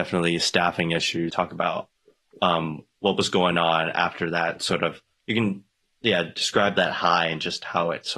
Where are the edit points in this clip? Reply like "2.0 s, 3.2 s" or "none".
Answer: 1.3 s